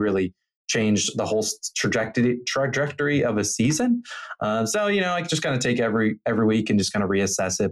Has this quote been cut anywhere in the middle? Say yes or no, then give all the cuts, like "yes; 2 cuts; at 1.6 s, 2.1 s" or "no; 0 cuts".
no; 0 cuts